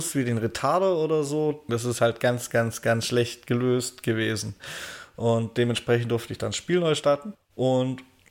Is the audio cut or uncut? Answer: cut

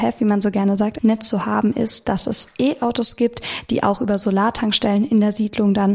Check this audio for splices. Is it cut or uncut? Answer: cut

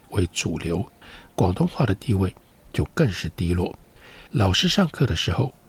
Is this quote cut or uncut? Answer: cut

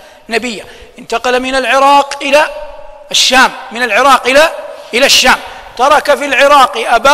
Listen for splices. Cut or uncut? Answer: uncut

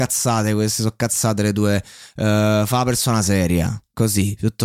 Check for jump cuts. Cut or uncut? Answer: uncut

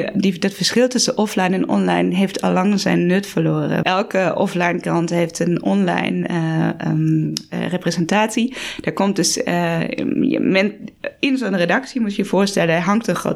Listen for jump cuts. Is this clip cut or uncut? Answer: cut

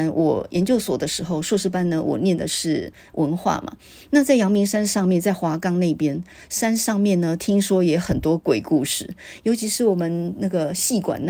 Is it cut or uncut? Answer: uncut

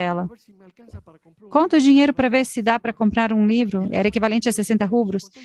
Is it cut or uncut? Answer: uncut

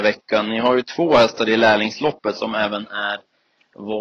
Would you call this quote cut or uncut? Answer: uncut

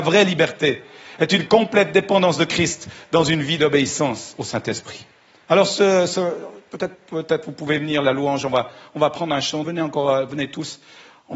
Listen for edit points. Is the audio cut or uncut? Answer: cut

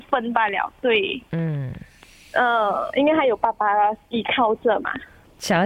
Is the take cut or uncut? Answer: uncut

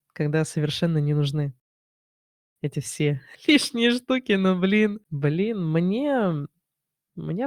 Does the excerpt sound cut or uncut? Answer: cut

